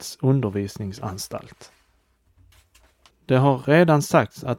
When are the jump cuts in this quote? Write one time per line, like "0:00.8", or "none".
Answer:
0:03.1